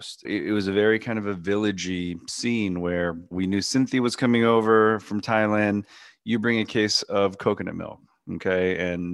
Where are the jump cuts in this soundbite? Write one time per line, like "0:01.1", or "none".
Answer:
0:03.3

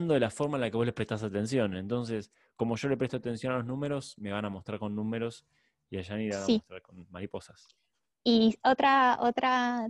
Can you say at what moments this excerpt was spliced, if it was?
none

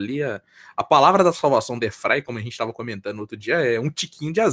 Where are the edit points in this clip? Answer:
none

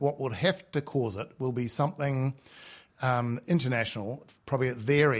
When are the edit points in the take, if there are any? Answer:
none

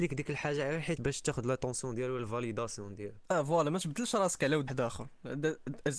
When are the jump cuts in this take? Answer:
0:01.0
0:04.7

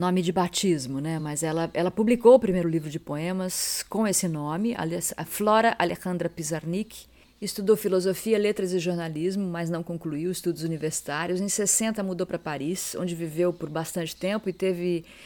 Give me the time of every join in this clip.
none

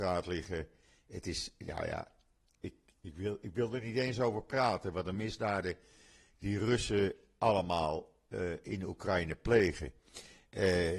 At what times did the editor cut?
none

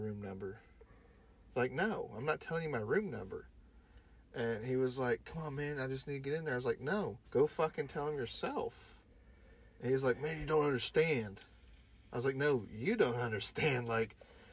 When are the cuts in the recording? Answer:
0:07.3

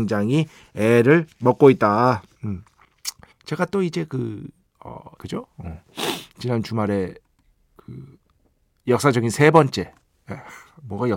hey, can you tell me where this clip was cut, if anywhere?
0:03.3
0:05.2

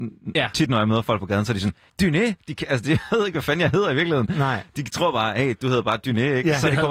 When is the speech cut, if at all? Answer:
0:01.9

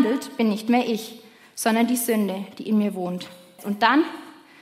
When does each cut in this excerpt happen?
0:03.6

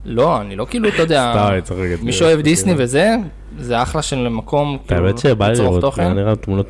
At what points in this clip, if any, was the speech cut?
0:02.0

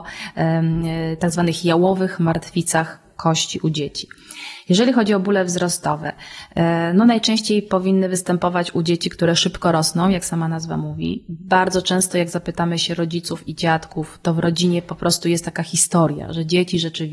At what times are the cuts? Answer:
none

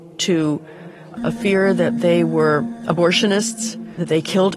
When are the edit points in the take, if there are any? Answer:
0:01.2

